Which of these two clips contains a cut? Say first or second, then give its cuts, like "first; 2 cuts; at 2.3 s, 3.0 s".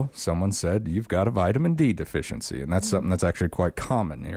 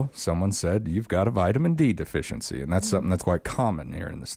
second; 1 cut; at 3.2 s